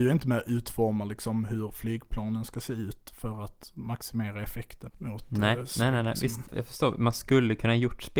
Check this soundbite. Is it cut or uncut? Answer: cut